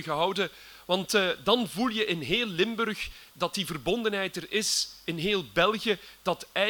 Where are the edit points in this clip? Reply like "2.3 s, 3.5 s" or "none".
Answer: none